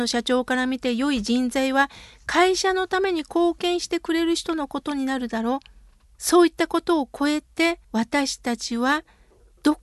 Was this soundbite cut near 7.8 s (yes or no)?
yes